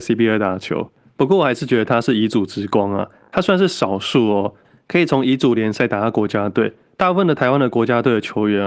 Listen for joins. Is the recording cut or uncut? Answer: uncut